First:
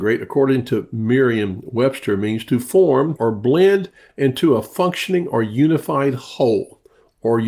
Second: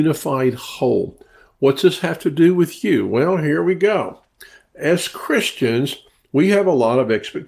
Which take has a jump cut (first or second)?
first